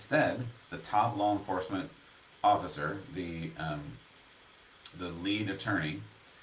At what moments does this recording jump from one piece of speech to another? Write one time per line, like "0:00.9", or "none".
0:04.9